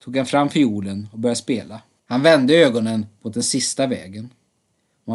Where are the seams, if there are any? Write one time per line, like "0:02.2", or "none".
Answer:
0:02.0